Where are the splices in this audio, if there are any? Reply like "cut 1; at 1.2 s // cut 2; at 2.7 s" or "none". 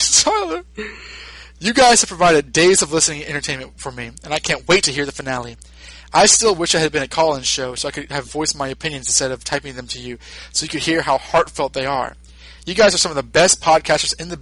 none